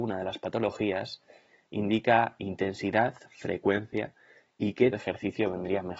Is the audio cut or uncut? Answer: cut